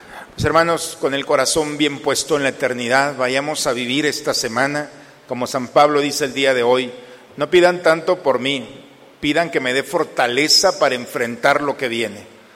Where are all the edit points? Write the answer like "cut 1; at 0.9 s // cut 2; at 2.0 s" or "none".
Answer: none